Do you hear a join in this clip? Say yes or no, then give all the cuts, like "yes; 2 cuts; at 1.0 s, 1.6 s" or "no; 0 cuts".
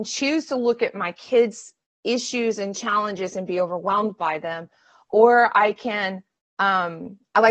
no; 0 cuts